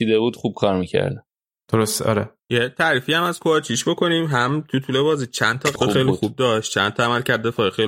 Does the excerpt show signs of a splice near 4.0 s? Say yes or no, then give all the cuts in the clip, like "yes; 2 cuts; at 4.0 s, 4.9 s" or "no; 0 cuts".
no; 2 cuts; at 2.4 s, 5.8 s